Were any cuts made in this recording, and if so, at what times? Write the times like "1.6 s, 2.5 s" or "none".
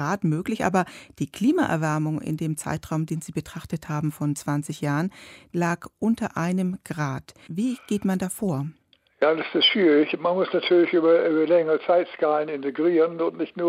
7.5 s